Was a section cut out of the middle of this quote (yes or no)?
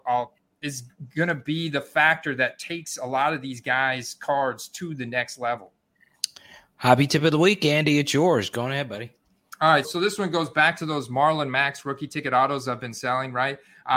yes